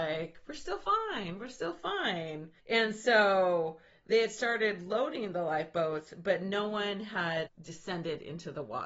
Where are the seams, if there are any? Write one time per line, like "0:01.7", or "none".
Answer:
0:02.6
0:07.4